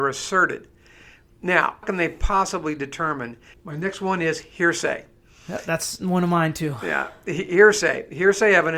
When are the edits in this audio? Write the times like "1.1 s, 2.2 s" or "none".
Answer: 1.8 s, 3.5 s